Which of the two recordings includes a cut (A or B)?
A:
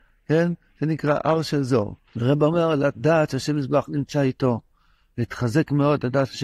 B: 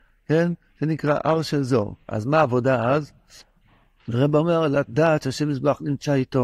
A